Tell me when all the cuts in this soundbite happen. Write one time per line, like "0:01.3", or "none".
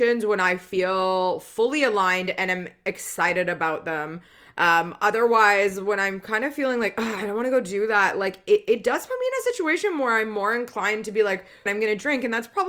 0:11.7